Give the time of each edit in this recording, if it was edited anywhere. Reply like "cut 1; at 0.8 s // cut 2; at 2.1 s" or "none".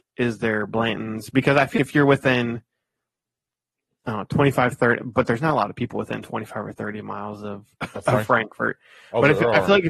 cut 1; at 1.8 s

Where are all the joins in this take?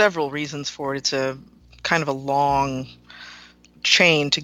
none

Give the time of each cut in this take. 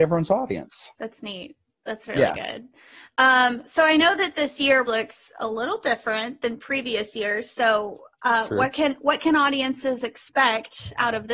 cut 1; at 4.9 s

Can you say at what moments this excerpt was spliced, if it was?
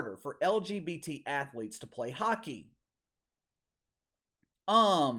none

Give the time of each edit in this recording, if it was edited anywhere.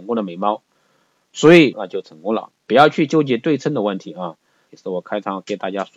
cut 1; at 1.7 s // cut 2; at 4.7 s

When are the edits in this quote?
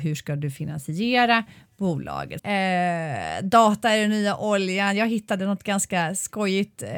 cut 1; at 2.4 s

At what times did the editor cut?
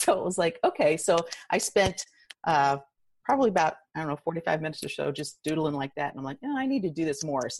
none

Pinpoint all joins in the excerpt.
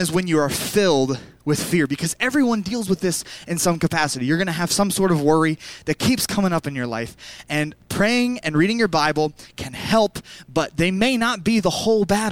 none

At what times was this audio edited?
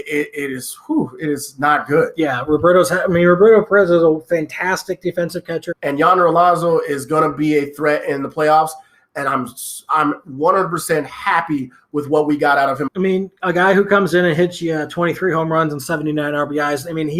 cut 1; at 5.7 s // cut 2; at 12.9 s

